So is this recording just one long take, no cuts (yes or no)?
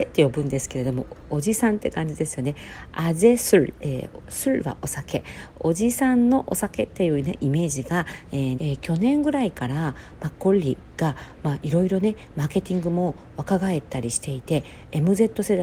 no